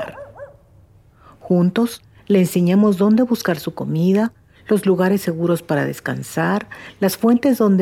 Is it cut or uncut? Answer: uncut